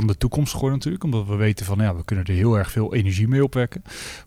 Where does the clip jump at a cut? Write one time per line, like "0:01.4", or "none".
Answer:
none